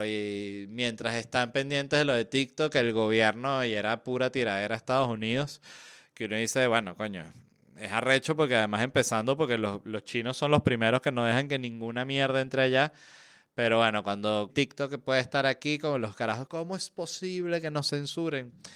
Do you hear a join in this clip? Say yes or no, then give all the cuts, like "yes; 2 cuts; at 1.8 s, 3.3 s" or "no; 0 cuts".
yes; 2 cuts; at 14.5 s, 16.5 s